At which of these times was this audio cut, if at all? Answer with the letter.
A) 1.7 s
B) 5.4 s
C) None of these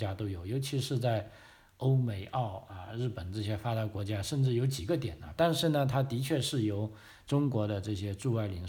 B